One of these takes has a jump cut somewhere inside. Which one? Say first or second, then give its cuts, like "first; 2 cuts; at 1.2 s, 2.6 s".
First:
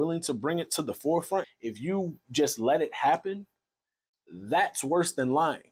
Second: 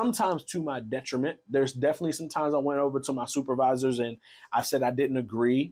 first; 1 cut; at 1.4 s